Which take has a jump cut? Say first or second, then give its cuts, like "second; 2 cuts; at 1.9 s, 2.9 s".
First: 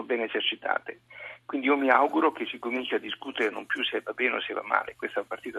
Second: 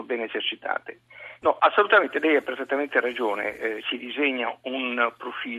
second; 2 cuts; at 1.4 s, 3.8 s